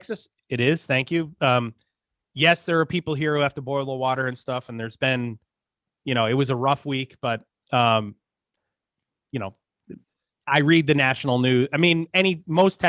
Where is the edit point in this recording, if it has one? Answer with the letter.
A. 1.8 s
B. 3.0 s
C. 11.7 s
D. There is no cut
D